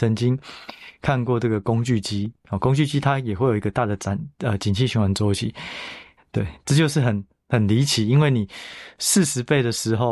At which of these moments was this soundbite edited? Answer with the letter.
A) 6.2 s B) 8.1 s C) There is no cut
A